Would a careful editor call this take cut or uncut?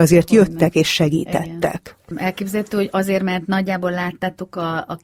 uncut